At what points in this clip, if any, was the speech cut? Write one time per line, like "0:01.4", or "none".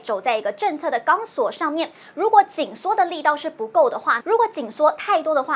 0:04.2